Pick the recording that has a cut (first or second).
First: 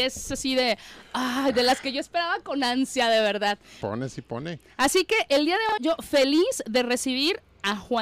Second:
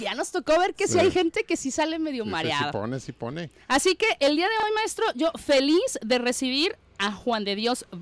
first